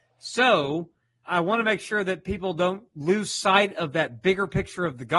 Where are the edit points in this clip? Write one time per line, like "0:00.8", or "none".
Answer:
0:01.2

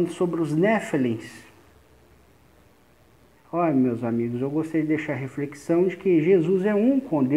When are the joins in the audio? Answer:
0:03.4

